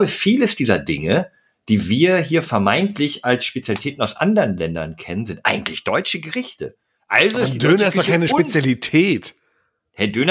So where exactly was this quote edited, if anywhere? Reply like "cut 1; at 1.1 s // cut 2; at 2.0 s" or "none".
none